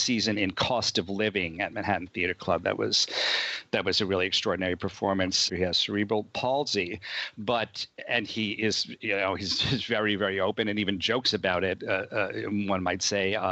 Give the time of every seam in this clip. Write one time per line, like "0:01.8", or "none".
0:05.5

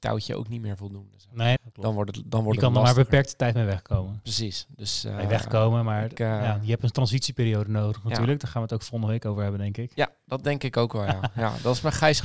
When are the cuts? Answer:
0:01.6

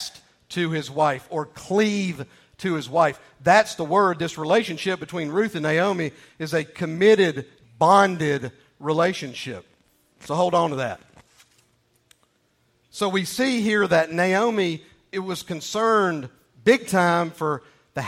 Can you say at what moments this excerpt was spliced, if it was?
0:07.6

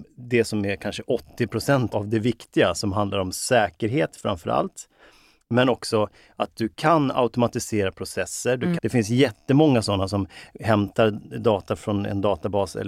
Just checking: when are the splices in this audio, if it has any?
0:01.9
0:08.8
0:11.8

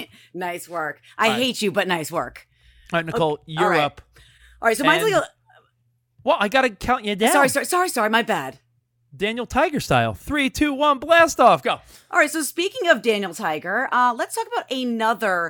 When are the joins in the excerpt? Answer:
none

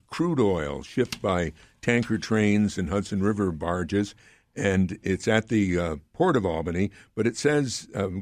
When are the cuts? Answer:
none

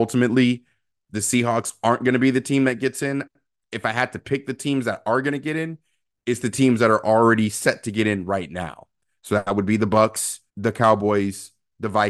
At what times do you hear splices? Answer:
0:10.5

